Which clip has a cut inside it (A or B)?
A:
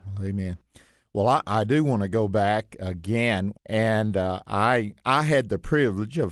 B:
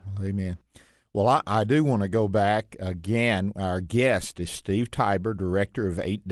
A